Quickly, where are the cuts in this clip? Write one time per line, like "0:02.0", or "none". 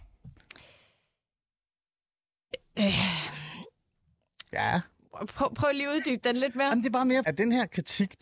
0:07.2